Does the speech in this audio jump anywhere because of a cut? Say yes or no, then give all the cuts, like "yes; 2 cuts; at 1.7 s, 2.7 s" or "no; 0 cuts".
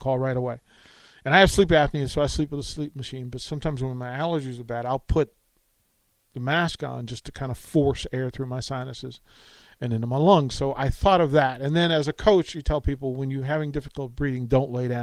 no; 0 cuts